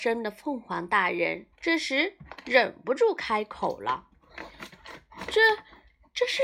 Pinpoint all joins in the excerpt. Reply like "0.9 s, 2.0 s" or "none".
1.5 s